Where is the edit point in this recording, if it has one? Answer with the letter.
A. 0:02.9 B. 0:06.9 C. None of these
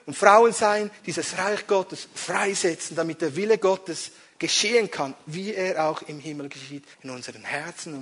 B